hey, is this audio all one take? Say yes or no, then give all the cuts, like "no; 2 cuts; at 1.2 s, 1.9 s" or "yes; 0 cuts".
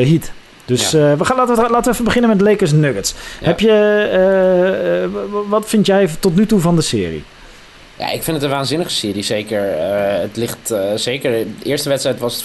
yes; 0 cuts